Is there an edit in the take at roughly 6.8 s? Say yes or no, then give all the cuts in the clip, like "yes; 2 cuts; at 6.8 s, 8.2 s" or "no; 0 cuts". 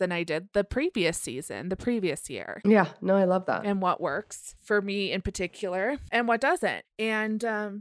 yes; 1 cut; at 6.8 s